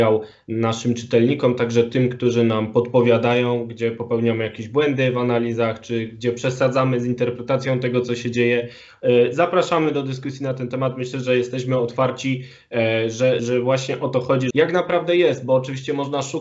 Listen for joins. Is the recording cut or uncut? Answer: cut